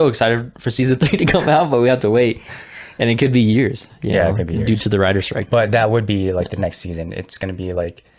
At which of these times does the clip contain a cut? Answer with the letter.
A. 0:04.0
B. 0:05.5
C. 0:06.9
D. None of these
B